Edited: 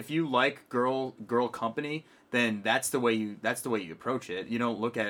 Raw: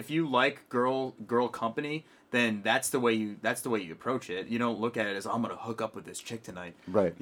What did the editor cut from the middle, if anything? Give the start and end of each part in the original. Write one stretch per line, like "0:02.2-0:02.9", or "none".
none